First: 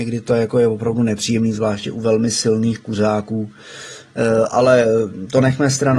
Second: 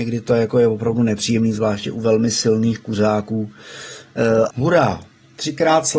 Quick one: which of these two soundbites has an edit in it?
second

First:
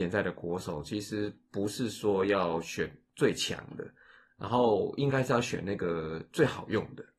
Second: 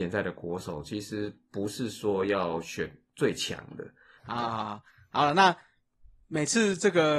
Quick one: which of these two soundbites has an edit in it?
second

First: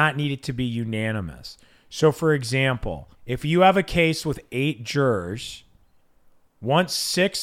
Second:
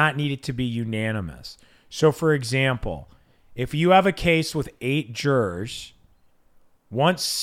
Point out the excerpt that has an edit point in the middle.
first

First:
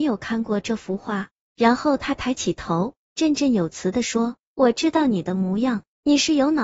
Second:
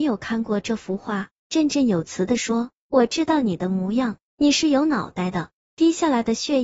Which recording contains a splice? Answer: second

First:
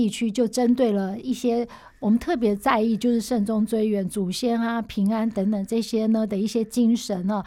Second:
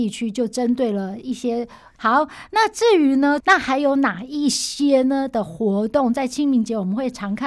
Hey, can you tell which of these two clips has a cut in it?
second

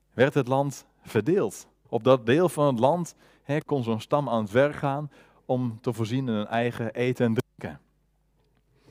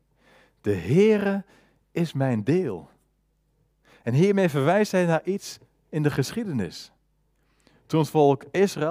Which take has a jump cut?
first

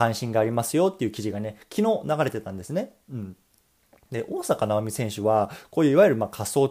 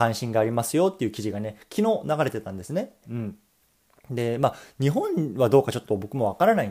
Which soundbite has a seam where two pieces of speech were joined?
second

